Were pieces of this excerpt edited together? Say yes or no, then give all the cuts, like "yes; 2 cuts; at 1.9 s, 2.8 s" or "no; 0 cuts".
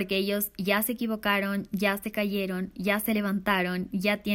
no; 0 cuts